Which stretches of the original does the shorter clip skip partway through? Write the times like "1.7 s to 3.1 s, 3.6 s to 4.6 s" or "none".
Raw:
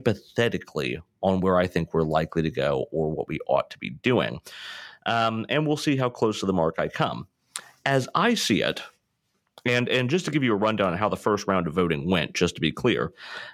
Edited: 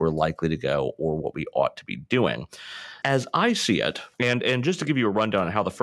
4.9 s to 7.8 s, 8.9 s to 9.6 s